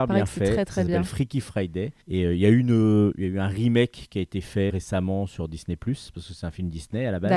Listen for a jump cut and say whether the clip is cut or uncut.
cut